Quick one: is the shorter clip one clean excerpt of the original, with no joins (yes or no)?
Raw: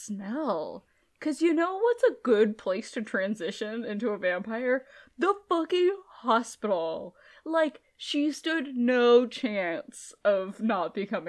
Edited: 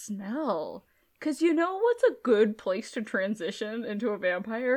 yes